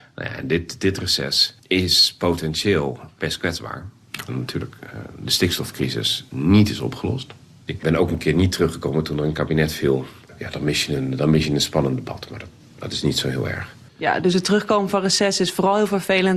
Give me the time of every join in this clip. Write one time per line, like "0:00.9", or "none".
0:04.3
0:07.7